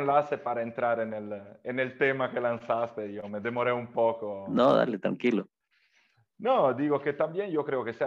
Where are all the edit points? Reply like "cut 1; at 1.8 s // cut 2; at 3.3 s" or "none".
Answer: none